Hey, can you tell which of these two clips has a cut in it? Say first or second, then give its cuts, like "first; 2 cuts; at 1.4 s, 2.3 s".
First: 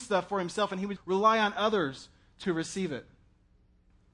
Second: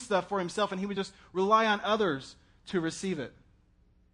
first; 1 cut; at 1.0 s